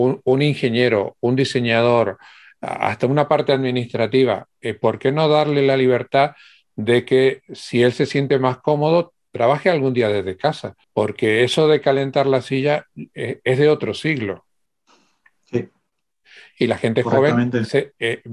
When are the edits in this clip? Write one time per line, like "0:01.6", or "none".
0:10.8